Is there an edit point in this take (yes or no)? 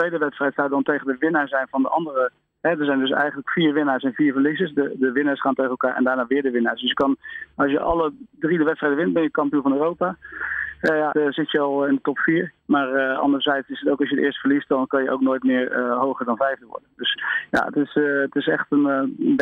yes